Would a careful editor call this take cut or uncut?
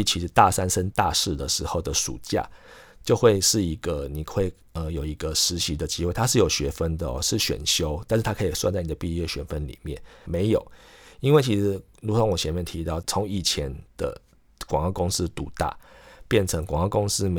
cut